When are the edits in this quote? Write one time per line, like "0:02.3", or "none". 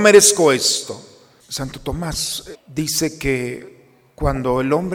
0:01.4
0:02.5